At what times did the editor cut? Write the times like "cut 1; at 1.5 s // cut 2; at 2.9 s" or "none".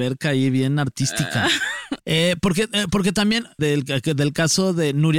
cut 1; at 2.0 s // cut 2; at 3.6 s